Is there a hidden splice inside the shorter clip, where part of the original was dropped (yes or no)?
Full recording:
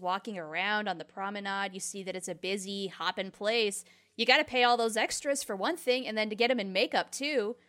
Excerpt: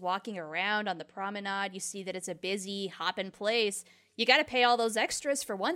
no